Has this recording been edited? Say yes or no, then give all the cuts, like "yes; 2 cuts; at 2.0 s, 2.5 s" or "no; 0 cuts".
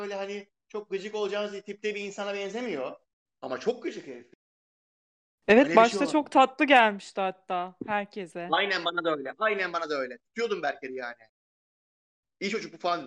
no; 0 cuts